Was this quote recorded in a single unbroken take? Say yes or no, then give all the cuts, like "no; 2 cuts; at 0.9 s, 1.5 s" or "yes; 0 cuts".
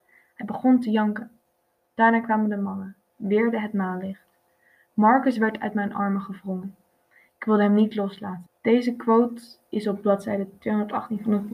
no; 2 cuts; at 3.1 s, 8.5 s